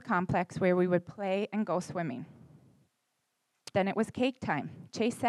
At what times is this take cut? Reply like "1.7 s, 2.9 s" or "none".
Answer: 3.7 s

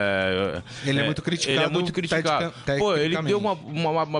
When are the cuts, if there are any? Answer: none

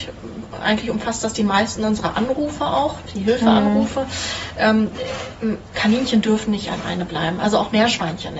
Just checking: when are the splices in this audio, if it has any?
none

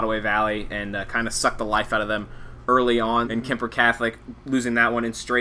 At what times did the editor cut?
3.2 s

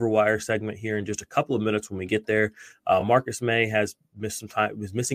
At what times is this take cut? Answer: none

